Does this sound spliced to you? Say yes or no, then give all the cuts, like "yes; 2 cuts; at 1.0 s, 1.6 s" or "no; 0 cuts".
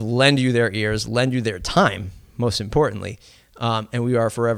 no; 0 cuts